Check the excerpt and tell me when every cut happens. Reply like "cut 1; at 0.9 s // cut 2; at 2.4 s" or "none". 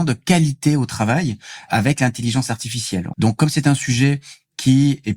cut 1; at 3.1 s